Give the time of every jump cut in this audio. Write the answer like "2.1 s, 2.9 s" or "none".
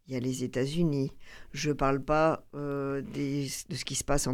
none